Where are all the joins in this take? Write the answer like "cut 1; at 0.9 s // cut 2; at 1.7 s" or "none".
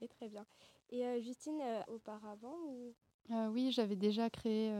cut 1; at 1.9 s